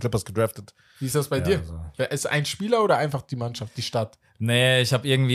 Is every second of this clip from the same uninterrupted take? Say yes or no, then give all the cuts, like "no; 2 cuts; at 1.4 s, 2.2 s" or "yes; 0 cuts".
yes; 0 cuts